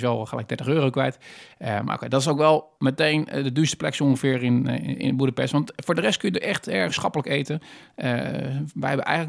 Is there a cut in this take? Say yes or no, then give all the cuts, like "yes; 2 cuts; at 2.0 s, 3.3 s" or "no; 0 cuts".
yes; 1 cut; at 2.8 s